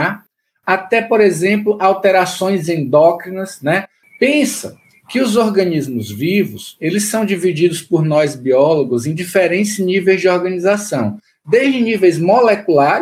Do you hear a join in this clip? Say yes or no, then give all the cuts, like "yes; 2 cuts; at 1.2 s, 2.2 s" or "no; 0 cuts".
yes; 1 cut; at 4.0 s